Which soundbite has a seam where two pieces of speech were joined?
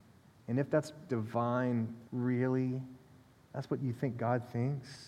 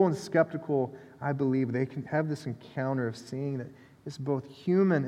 first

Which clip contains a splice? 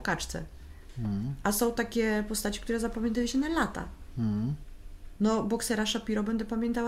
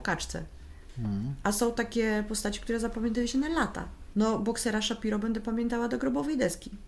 second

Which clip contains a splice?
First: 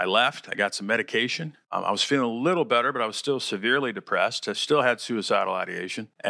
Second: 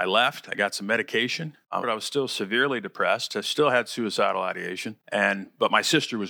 second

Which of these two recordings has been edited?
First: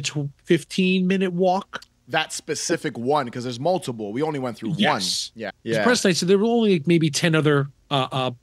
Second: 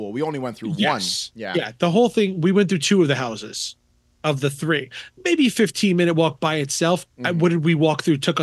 first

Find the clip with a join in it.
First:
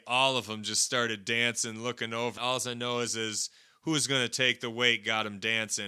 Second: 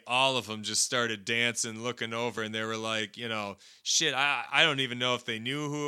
first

